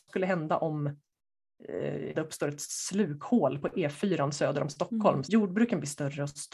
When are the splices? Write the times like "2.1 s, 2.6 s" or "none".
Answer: 2.1 s, 5.2 s